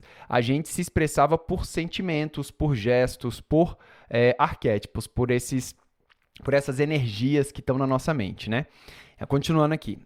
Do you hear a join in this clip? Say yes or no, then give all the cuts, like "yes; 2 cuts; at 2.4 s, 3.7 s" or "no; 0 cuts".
no; 0 cuts